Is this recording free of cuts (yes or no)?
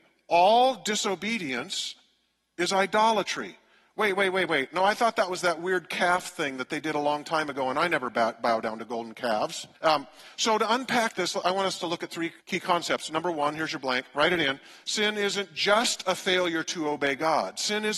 no